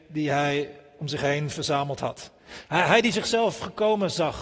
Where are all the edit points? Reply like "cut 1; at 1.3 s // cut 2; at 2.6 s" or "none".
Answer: cut 1; at 2.4 s